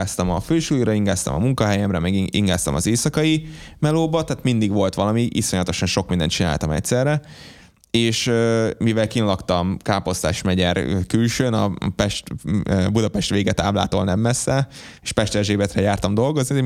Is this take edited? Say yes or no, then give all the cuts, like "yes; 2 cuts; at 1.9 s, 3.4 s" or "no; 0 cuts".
no; 0 cuts